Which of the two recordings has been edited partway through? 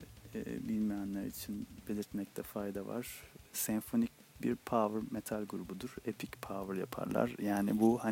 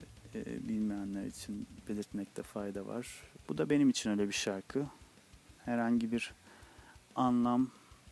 second; 1 cut; at 3.5 s

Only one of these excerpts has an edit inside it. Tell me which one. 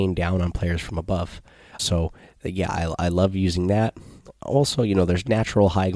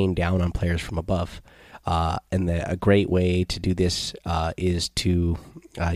first; 1 cut; at 1.8 s

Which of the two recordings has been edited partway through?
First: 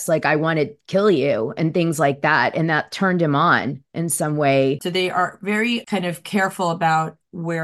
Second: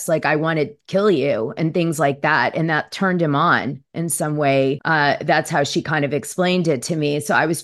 first; 1 cut; at 4.8 s

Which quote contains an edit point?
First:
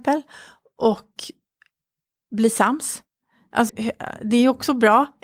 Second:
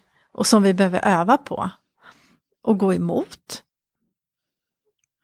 first; 1 cut; at 3.7 s

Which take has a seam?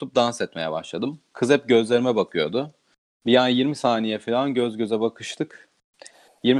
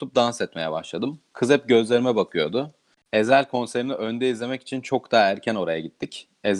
second; 1 cut; at 3.0 s

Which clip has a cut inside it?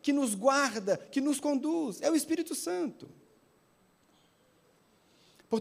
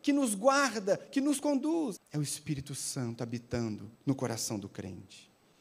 second; 2 cuts; at 2.0 s, 4.0 s

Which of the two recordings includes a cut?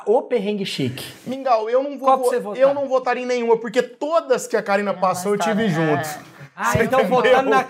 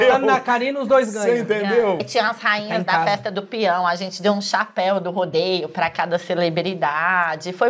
second; 1 cut; at 2.0 s

